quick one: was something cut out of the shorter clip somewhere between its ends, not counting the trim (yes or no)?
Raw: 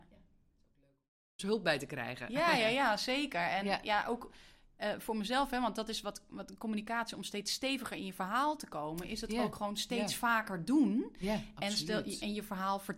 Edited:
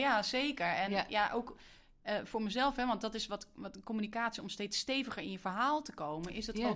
no